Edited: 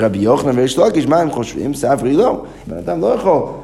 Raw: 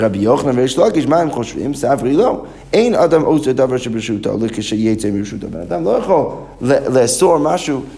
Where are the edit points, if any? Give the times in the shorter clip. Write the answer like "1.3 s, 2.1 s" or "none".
2.7 s